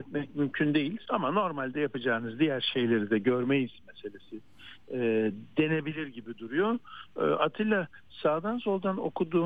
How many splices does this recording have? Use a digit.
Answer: 1